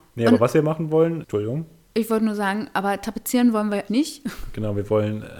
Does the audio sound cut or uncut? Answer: cut